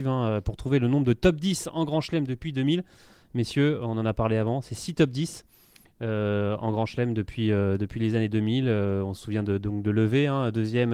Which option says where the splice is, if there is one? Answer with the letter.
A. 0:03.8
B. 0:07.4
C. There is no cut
C